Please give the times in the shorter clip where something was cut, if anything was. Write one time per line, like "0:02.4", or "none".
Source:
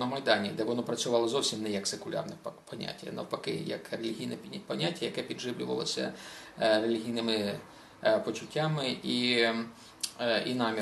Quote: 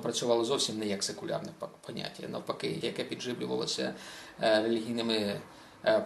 0:02.8